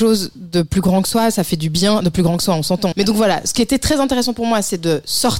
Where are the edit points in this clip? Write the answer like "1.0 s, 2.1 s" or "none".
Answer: 2.9 s